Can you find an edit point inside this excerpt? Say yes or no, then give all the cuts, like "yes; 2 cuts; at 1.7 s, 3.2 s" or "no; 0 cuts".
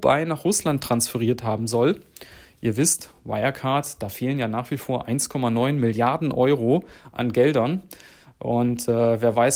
no; 0 cuts